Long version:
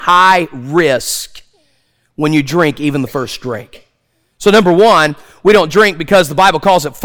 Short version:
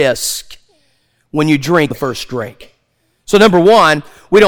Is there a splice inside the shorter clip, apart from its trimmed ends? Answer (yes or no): yes